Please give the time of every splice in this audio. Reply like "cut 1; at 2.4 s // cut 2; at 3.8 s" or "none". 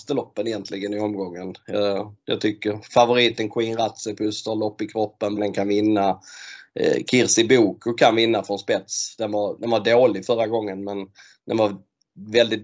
cut 1; at 5.4 s